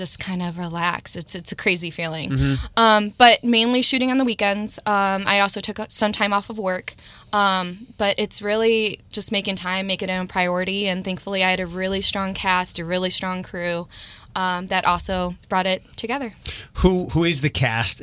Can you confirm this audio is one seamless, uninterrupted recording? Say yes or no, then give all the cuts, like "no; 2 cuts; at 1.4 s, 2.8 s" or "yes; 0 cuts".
yes; 0 cuts